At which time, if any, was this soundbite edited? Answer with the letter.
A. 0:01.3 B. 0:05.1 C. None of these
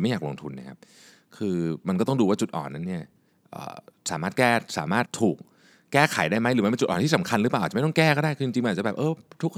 B